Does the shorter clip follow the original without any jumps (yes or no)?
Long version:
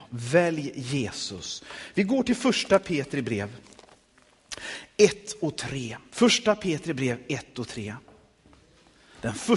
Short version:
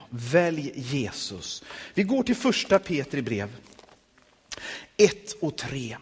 yes